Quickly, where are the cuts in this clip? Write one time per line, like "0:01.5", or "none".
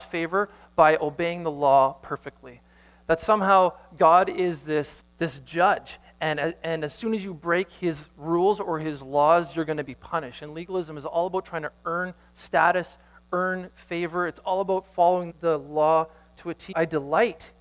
0:05.0
0:15.3
0:16.7